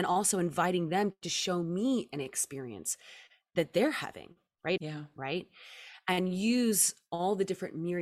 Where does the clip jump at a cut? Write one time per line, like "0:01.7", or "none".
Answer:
0:04.8